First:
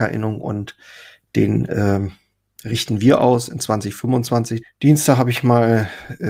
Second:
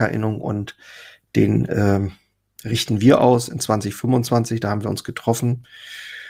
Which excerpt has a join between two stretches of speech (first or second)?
first